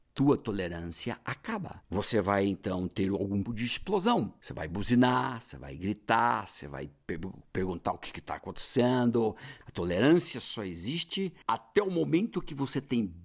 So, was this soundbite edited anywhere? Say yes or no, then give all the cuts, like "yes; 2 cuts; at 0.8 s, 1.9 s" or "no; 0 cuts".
yes; 3 cuts; at 3.5 s, 9.6 s, 11.4 s